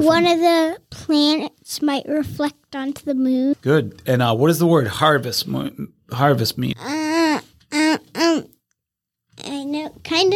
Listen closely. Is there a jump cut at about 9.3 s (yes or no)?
no